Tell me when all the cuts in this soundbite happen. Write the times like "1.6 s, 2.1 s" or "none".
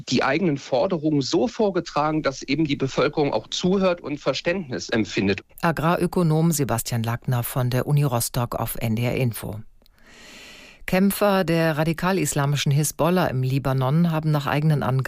5.5 s